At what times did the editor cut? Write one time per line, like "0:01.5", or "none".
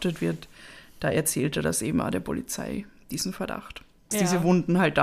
0:04.1